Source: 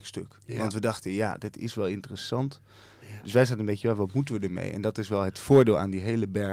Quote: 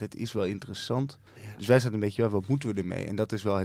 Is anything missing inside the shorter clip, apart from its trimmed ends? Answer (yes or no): yes